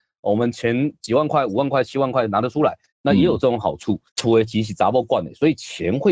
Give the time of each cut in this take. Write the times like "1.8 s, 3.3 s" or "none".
2.9 s, 4.1 s